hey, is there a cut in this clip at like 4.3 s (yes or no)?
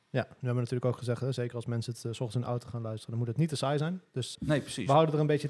yes